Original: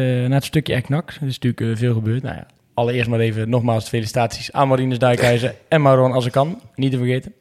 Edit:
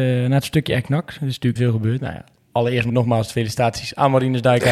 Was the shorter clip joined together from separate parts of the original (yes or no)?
yes